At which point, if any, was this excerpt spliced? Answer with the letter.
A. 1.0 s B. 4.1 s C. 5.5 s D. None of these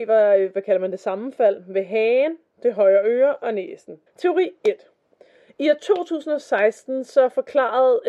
B